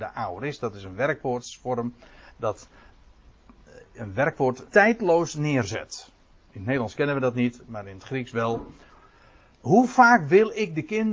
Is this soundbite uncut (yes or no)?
no